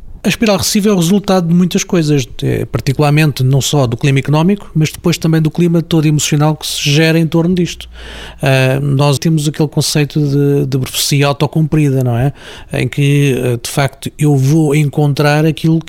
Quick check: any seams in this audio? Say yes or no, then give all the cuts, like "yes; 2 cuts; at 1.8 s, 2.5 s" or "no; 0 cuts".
yes; 1 cut; at 9.2 s